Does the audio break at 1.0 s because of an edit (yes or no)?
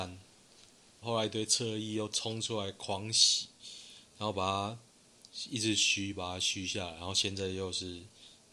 yes